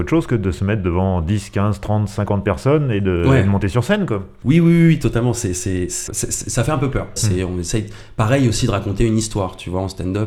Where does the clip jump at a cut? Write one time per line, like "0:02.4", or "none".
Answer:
0:06.1
0:07.2

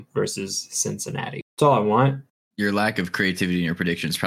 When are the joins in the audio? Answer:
0:01.5

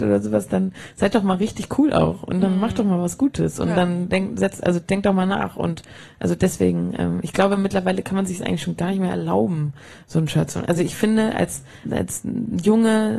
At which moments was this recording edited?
0:11.8

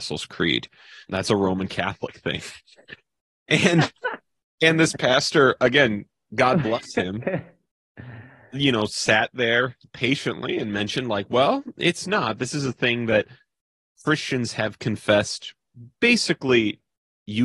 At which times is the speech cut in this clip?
0:01.1

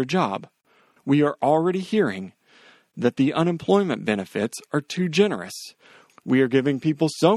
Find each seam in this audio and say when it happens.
0:01.0
0:06.1

